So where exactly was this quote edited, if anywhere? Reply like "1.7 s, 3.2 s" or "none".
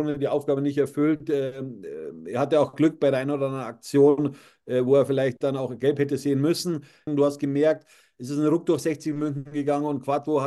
7.1 s